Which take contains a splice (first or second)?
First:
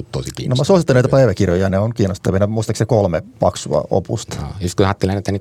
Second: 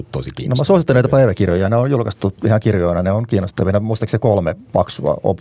first